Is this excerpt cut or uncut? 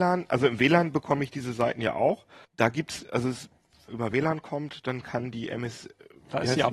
cut